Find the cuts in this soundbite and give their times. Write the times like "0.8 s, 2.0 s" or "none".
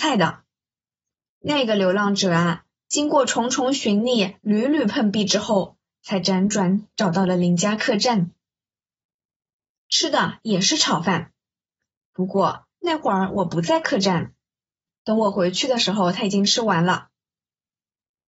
none